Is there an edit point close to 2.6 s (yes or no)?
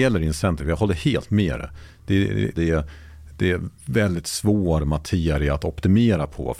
yes